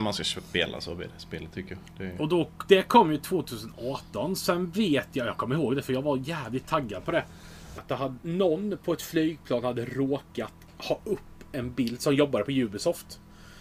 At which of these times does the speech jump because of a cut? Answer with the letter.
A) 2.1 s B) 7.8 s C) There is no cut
B